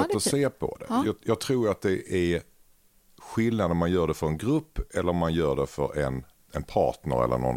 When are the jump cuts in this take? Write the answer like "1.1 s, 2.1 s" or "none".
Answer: 1.0 s, 6.5 s

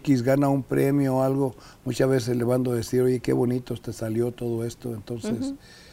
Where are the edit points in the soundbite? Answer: none

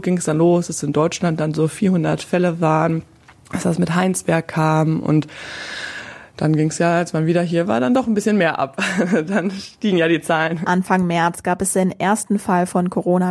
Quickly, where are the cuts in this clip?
none

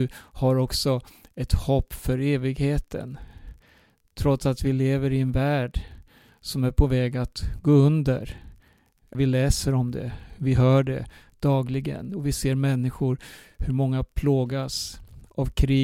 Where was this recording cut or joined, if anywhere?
9.1 s

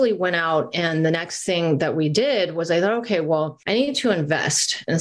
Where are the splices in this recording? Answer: none

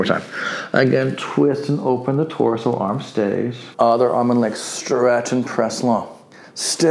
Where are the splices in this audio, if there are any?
3.7 s

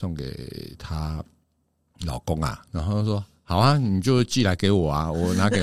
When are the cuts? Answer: none

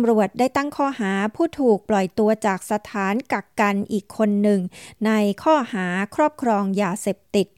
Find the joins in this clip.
none

